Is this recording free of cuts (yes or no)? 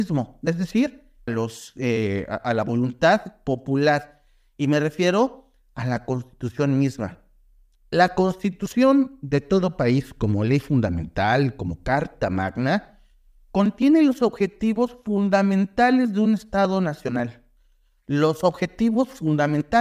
no